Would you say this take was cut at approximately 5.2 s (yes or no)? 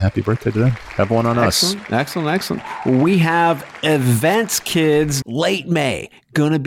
yes